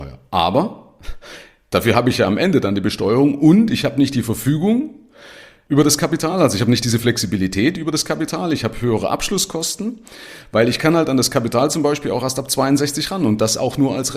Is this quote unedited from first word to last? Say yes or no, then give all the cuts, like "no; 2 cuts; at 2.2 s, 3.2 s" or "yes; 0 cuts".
yes; 0 cuts